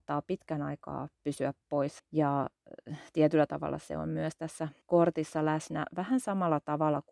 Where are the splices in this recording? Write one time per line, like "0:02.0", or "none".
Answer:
0:02.0
0:04.8